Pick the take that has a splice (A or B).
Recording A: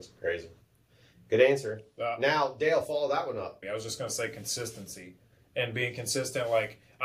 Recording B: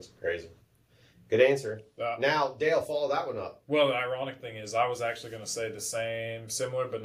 A